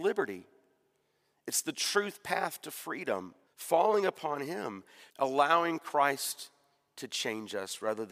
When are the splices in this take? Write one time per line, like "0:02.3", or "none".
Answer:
0:03.5
0:05.1